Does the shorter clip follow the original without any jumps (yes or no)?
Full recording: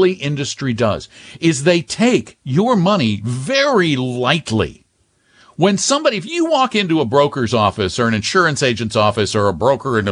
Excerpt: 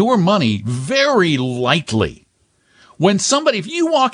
yes